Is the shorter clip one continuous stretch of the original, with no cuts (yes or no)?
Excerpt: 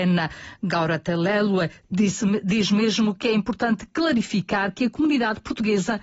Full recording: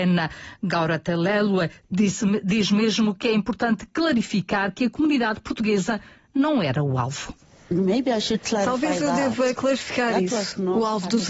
yes